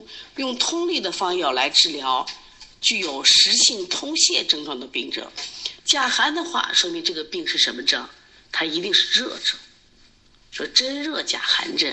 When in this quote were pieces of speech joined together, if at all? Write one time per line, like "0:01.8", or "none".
0:05.8